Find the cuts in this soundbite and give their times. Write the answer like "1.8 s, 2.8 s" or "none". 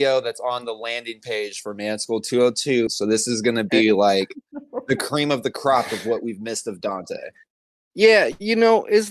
2.9 s